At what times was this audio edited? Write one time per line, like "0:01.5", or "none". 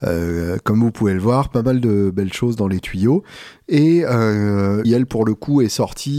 0:04.8